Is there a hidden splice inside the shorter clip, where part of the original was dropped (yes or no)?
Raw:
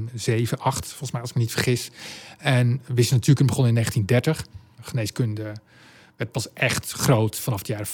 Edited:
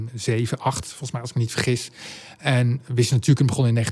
no